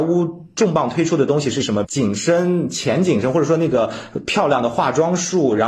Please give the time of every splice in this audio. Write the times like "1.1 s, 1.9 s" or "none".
1.8 s